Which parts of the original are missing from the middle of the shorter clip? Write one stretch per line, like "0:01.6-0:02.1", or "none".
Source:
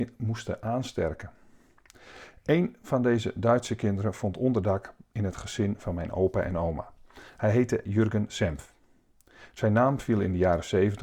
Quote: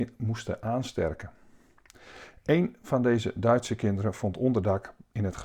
none